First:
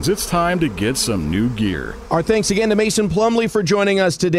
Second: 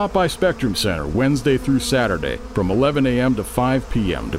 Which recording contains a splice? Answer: first; 1 cut; at 2.1 s

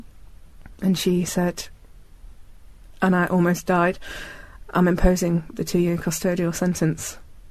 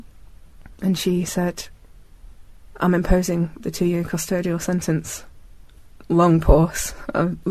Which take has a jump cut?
second; 1 cut; at 2.7 s

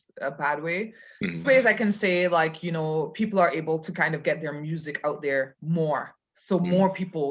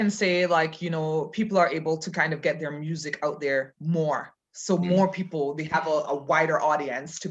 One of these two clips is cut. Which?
first; 1 cut; at 1.4 s

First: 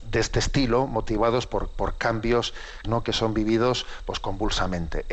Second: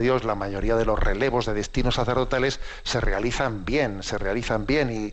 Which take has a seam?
first; 1 cut; at 2.8 s

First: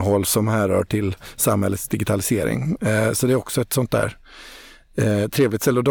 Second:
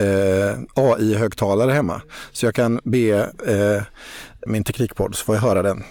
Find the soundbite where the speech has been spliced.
second; 1 cut; at 4.5 s

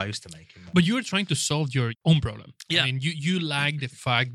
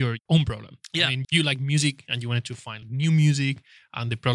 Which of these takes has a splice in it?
second; 2 cuts; at 1.2 s, 2.8 s

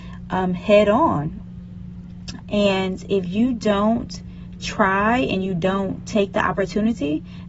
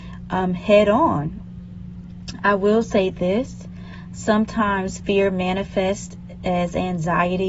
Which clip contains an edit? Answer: first; 1 cut; at 2.4 s

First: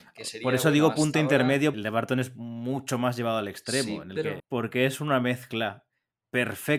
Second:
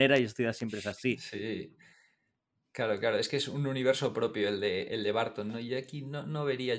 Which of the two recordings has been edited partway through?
first; 2 cuts; at 1.7 s, 4.4 s

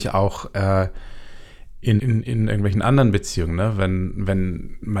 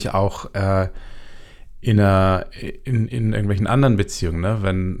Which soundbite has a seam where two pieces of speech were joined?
first; 1 cut; at 2.0 s

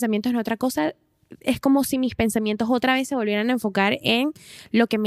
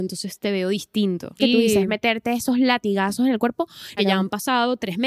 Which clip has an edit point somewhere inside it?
second; 2 cuts; at 1.4 s, 4.0 s

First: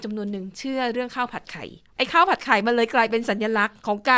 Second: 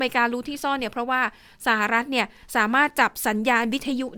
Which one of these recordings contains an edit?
first; 1 cut; at 1.9 s

